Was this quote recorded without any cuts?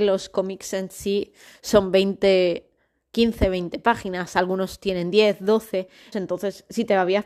no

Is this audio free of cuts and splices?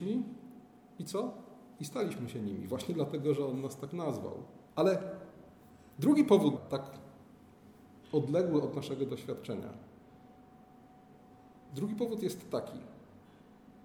no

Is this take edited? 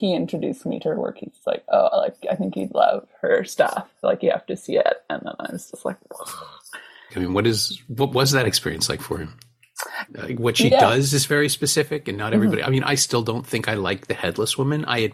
yes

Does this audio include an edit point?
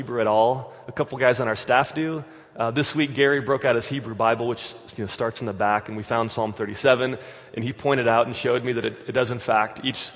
no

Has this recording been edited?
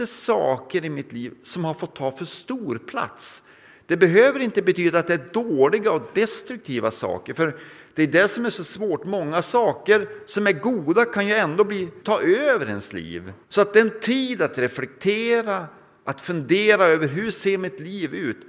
yes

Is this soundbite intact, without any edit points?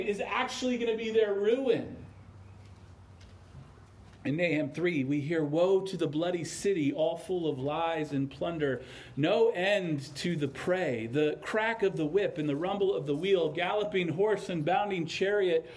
yes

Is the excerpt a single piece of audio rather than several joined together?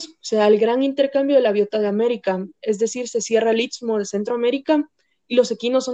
yes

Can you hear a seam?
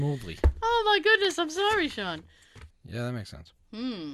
yes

